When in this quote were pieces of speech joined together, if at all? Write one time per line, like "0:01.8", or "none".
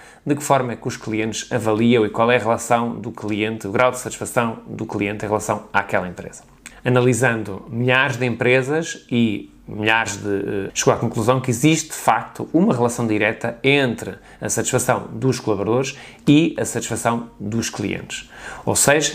0:06.7
0:10.7